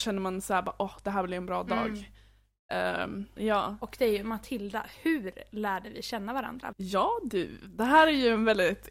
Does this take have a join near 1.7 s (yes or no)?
no